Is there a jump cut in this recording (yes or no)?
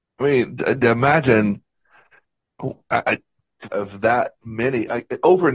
yes